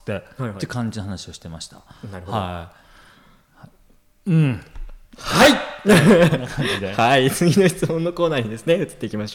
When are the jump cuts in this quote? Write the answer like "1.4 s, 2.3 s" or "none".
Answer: none

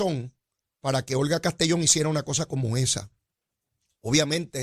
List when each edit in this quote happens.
none

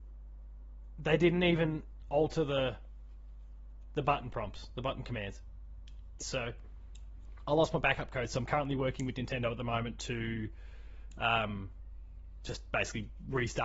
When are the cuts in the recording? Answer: 6.2 s

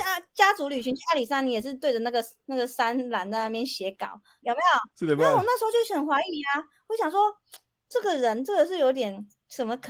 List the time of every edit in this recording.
4.4 s

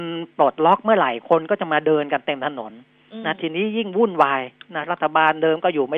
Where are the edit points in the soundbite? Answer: none

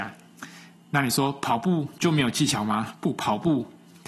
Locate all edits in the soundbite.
none

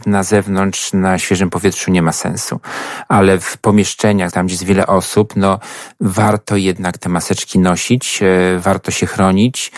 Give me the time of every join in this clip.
4.3 s

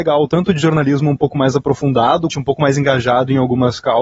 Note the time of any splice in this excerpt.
2.3 s

